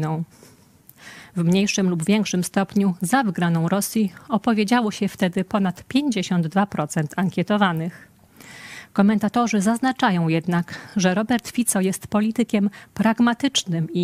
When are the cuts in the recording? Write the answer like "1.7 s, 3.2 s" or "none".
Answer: none